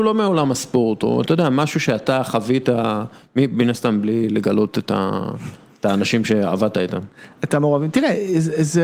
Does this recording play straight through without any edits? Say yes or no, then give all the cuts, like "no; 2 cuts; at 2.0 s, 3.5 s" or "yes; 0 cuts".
yes; 0 cuts